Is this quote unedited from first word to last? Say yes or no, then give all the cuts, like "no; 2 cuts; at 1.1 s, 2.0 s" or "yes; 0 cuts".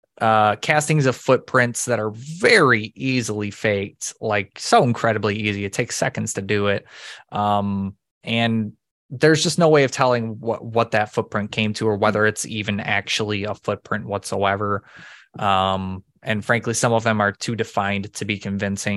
yes; 0 cuts